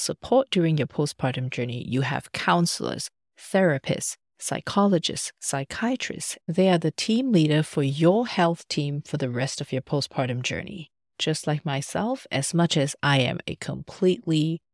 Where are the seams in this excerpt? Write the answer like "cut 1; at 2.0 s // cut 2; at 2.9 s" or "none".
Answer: cut 1; at 6.4 s // cut 2; at 11.1 s